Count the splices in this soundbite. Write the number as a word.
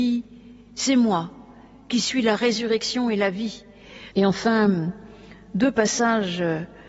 one